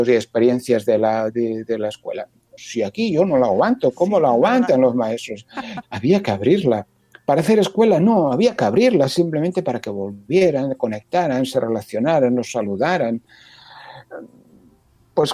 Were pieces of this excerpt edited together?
yes; 2 cuts; at 2.6 s, 5.8 s

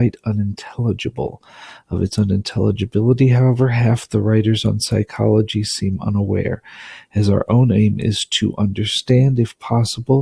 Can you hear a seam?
no; 0 cuts

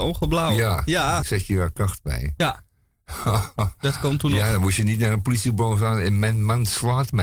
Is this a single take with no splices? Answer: no; 1 cut; at 1.2 s

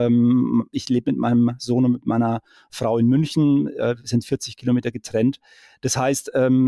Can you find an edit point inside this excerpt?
no; 0 cuts

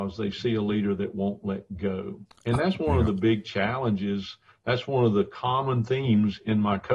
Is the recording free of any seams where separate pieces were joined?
yes; 0 cuts

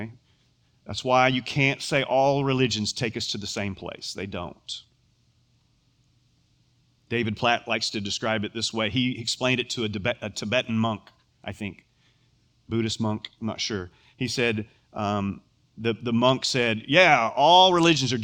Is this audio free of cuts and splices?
yes; 0 cuts

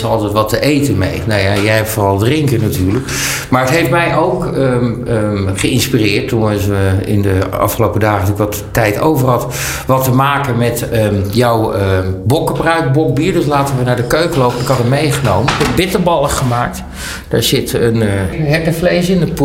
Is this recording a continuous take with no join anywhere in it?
no; 1 cut; at 18.3 s

